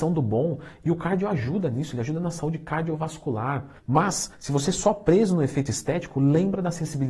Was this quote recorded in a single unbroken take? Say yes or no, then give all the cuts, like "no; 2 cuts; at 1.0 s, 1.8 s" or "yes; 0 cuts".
no; 1 cut; at 3.8 s